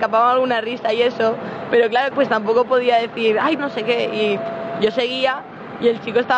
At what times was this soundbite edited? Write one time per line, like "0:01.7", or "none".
0:02.1
0:03.6